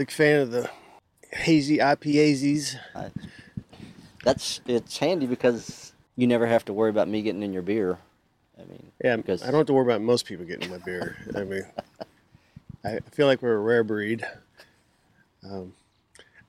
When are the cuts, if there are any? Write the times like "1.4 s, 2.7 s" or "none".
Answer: 3.7 s